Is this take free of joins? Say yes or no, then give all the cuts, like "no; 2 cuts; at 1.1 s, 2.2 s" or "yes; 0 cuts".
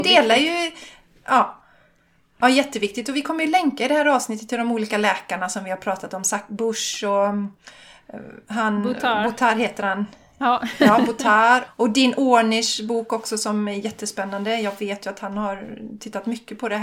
no; 1 cut; at 11.7 s